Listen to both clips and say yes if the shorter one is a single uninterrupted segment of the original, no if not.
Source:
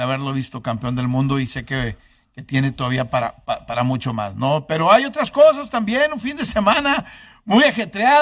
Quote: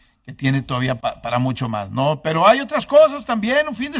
no